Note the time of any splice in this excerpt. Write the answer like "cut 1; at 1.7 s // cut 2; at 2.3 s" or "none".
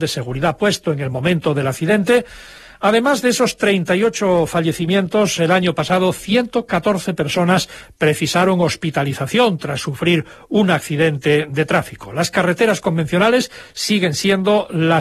none